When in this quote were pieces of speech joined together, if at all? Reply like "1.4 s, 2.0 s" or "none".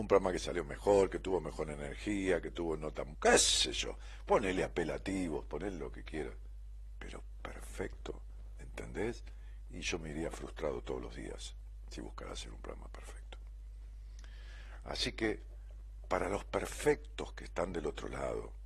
3.1 s

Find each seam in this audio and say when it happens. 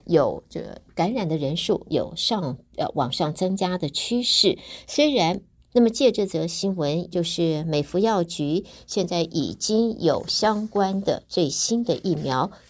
5.7 s, 7.1 s

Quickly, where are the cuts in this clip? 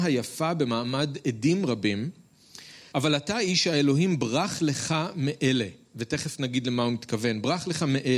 2.9 s

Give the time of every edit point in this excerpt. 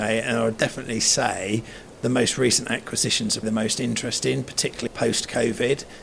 3.4 s, 4.9 s

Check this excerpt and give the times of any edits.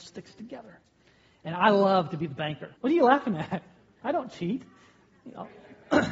2.8 s

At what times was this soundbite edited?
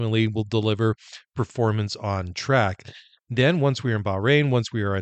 none

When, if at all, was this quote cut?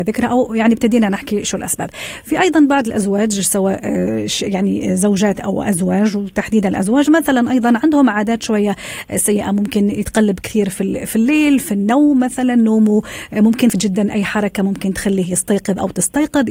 13.7 s

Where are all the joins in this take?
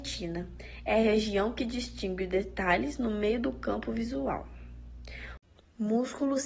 none

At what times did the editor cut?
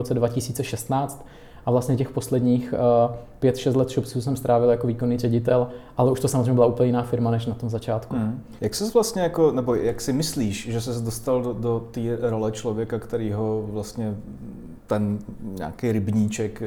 8.6 s

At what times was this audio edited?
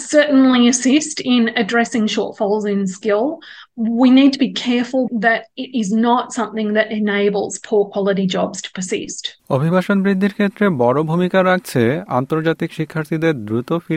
5.1 s, 9.4 s

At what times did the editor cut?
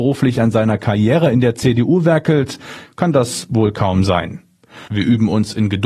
4.9 s

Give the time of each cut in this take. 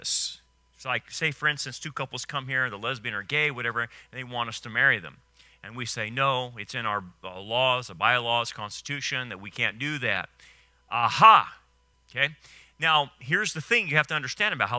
11.9 s

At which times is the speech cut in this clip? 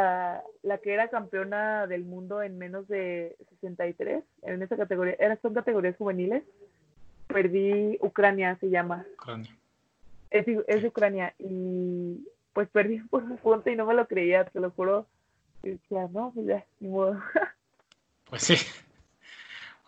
none

